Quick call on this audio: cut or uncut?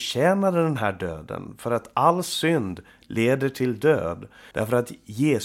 cut